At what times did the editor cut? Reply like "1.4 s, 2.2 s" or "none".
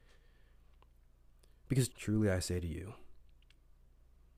1.9 s